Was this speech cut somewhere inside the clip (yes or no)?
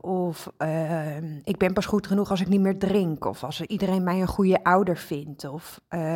no